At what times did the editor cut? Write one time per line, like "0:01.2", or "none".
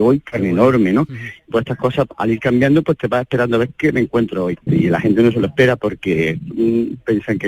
0:01.5
0:04.7